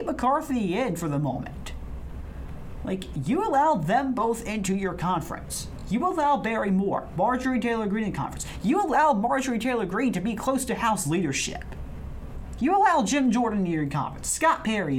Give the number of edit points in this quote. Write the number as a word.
zero